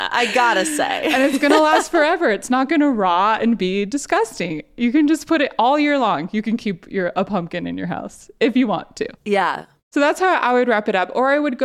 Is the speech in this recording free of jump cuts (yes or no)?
yes